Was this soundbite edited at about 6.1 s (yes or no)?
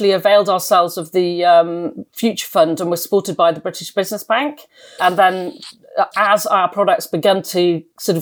yes